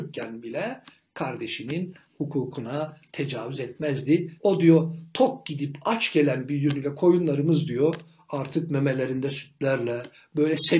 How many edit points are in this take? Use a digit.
1